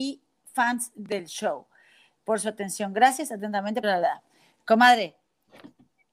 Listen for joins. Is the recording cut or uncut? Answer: cut